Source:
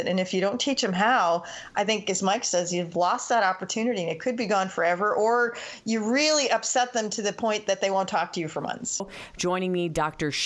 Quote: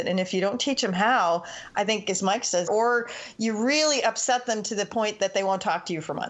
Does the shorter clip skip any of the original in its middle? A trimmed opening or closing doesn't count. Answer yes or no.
yes